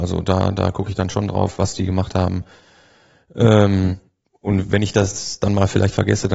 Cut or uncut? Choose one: uncut